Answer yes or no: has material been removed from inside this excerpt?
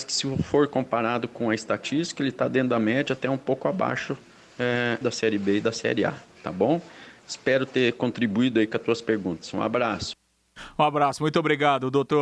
yes